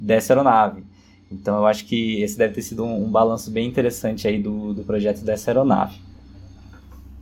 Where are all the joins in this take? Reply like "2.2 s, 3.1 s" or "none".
none